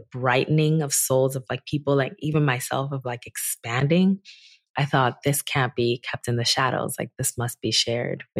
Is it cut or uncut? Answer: uncut